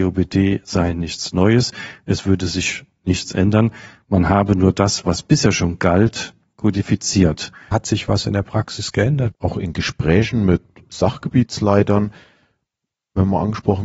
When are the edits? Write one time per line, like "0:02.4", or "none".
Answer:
0:07.7
0:09.3